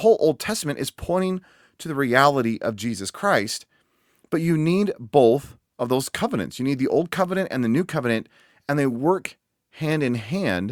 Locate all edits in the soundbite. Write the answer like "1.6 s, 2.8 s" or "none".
none